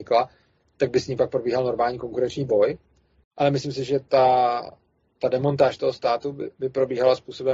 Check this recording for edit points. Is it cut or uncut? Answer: cut